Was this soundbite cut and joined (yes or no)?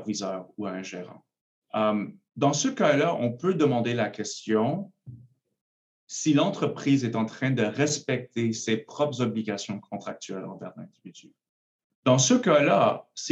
yes